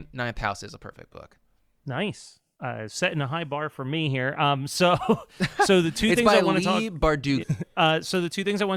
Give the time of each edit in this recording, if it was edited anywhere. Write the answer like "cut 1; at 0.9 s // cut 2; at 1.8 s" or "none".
cut 1; at 7.4 s